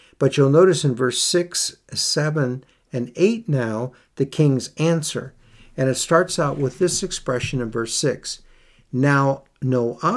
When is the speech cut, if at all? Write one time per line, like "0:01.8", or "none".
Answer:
none